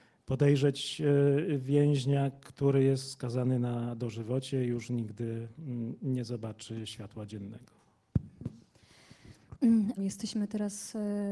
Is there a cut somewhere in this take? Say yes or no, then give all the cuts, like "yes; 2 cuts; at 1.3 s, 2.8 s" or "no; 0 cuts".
yes; 1 cut; at 10.0 s